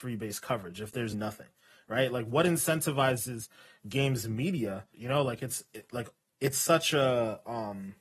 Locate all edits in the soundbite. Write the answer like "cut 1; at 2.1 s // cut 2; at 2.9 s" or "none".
cut 1; at 1.1 s // cut 2; at 4.9 s